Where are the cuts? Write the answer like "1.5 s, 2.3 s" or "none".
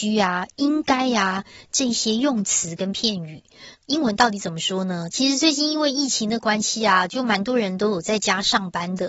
3.8 s, 5.1 s